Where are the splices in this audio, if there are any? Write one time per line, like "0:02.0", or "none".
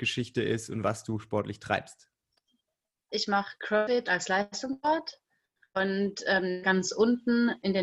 0:03.1
0:06.6